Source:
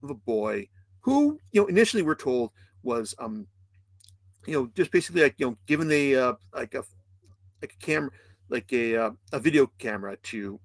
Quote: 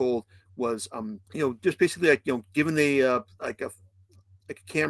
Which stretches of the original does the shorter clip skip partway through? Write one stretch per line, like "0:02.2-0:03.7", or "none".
0:03.5-0:04.4